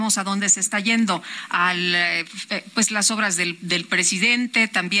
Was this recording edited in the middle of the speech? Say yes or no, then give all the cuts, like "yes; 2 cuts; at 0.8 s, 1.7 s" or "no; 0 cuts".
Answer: no; 0 cuts